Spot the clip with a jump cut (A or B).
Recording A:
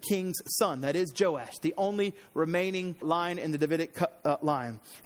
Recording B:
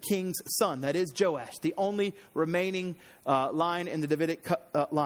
A